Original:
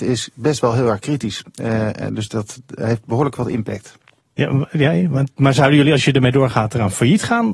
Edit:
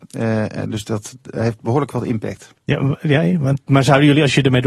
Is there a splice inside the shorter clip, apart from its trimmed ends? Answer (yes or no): yes